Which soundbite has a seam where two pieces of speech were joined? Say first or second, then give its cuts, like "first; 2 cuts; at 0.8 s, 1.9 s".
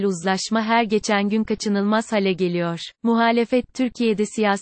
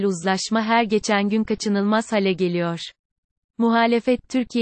first; 1 cut; at 2.9 s